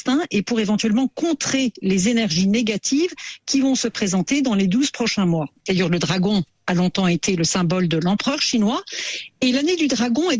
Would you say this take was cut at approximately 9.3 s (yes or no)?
no